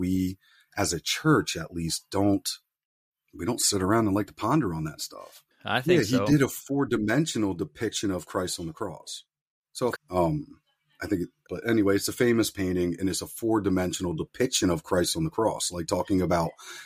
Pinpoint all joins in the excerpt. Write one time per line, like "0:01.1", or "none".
0:05.5
0:10.0
0:11.5